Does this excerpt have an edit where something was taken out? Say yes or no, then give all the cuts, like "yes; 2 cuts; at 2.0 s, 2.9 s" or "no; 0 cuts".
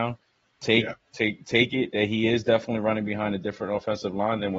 no; 0 cuts